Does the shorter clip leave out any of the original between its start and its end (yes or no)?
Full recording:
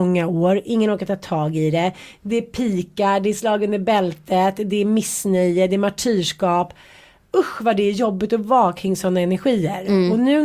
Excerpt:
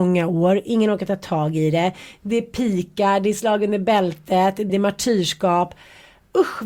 yes